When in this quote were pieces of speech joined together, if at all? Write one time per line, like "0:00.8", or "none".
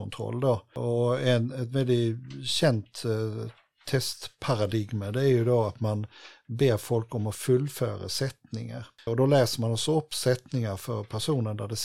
0:09.1